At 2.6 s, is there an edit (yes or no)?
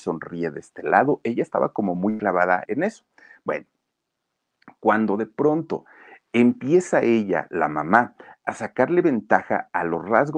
yes